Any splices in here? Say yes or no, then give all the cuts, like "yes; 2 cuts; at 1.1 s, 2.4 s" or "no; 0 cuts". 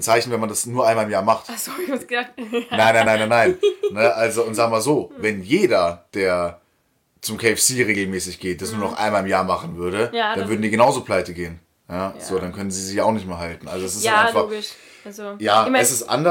no; 0 cuts